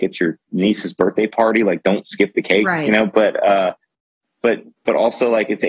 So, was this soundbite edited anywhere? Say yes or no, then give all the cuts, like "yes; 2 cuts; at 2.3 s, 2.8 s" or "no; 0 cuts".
no; 0 cuts